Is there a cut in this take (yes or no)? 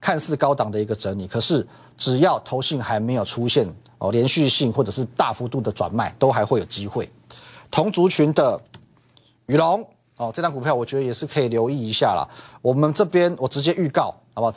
no